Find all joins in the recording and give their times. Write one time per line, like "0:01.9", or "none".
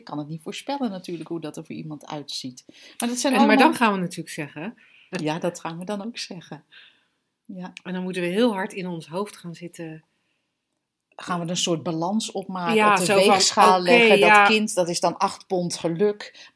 0:05.1